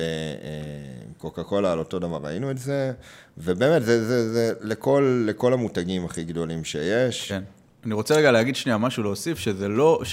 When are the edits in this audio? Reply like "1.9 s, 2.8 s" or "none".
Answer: none